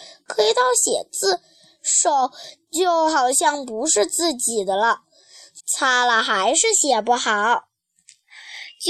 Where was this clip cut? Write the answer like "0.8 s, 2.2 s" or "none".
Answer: 5.6 s